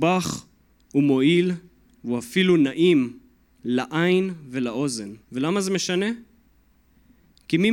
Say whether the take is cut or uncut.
cut